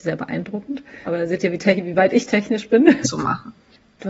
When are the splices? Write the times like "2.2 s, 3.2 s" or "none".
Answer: 1.1 s, 3.0 s